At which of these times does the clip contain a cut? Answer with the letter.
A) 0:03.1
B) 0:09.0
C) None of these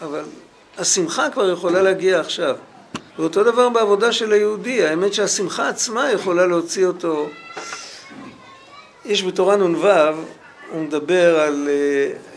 A